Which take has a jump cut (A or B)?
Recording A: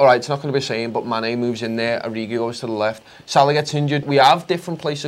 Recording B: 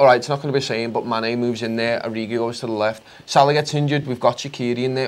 A